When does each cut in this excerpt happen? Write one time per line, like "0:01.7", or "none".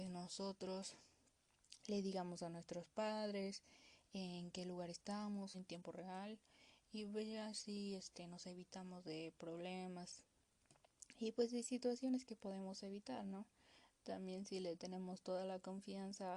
0:05.5